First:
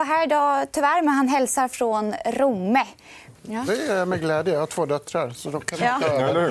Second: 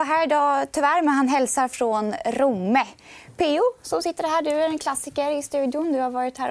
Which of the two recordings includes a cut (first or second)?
first